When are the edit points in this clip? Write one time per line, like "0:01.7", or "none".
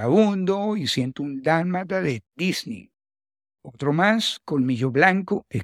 none